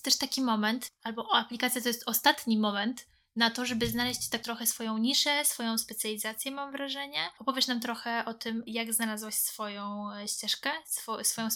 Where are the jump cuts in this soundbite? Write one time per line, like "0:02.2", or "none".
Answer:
0:07.4
0:08.7